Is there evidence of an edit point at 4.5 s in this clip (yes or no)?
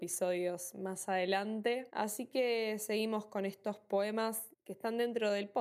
yes